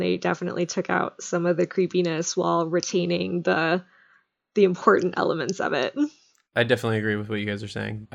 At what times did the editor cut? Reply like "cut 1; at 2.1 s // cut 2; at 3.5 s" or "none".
none

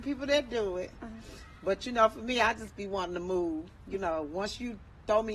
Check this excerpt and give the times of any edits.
none

